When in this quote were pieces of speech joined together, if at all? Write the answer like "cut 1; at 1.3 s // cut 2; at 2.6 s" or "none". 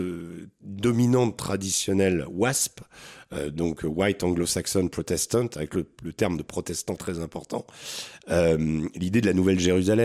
cut 1; at 7.0 s

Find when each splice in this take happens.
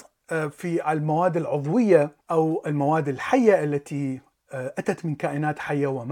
cut 1; at 2.2 s

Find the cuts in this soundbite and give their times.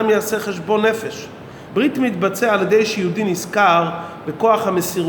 cut 1; at 1.7 s

